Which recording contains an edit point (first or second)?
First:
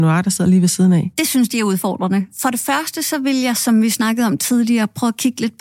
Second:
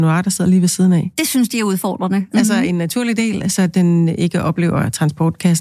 second